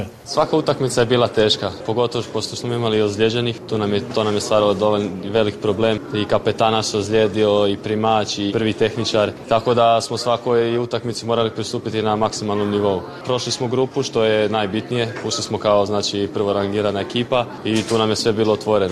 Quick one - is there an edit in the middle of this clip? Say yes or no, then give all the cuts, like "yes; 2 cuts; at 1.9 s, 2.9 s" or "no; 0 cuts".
yes; 1 cut; at 8.5 s